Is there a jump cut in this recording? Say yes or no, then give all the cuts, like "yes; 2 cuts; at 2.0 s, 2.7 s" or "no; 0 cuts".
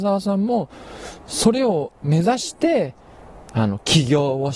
yes; 1 cut; at 3.4 s